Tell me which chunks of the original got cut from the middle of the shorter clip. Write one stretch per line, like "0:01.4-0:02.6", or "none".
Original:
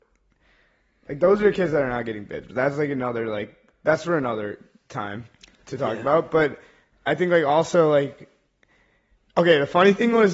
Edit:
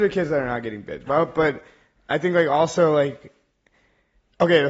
0:02.5-0:06.0